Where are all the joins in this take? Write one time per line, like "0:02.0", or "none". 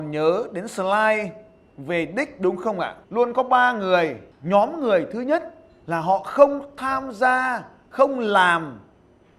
0:03.0
0:04.3